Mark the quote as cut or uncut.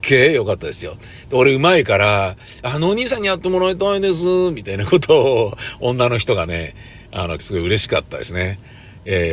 cut